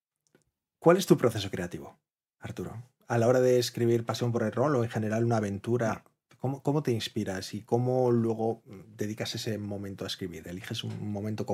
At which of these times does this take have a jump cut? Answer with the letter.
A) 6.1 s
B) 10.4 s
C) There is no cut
C